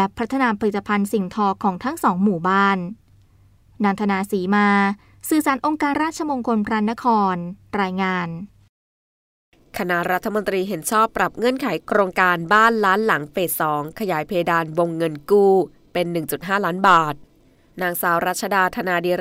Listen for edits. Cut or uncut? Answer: cut